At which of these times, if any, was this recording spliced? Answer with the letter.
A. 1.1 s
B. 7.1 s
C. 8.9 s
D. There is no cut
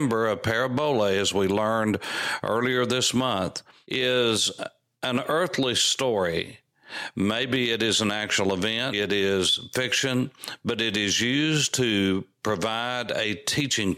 C